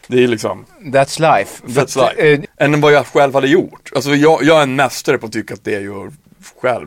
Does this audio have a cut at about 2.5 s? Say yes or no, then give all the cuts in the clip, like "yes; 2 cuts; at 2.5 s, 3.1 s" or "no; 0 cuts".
yes; 1 cut; at 2.5 s